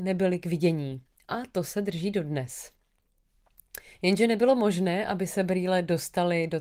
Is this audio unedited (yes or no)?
yes